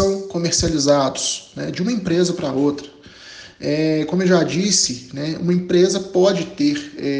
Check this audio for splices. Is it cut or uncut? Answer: uncut